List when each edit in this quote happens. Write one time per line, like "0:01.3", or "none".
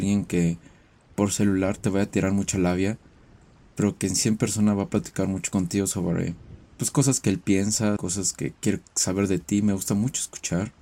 0:06.7
0:08.0